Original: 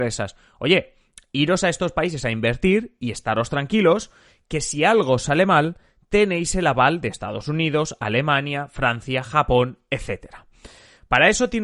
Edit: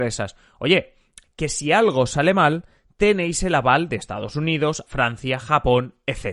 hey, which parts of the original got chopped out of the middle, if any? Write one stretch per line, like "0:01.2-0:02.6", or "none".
0:01.2-0:04.4
0:08.0-0:08.7